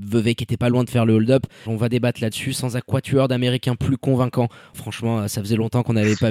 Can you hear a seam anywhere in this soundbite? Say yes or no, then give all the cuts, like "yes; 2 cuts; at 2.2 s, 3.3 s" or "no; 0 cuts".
yes; 2 cuts; at 1.7 s, 4.7 s